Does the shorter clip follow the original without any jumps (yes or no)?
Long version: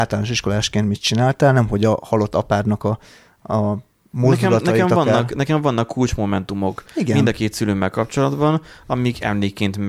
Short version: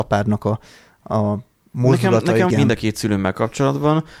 no